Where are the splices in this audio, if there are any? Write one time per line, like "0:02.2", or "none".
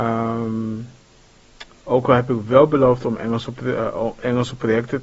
none

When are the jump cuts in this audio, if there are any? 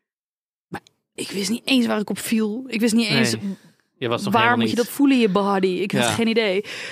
0:01.2

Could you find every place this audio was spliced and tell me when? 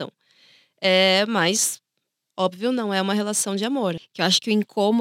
0:04.0

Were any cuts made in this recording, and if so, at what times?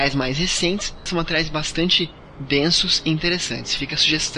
0:01.1

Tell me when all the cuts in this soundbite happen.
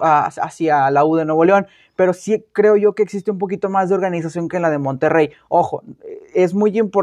none

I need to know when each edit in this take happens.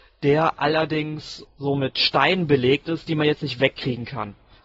0:01.4

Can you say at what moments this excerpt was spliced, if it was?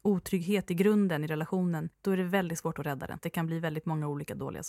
0:01.9
0:03.2

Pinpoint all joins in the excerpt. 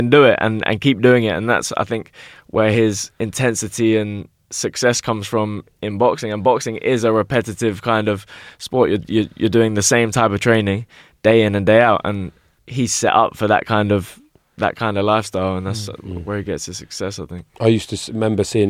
none

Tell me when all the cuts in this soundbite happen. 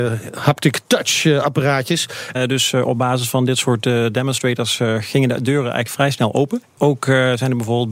0:02.3

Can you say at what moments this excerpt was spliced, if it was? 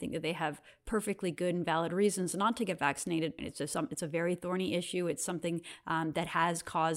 0:03.4

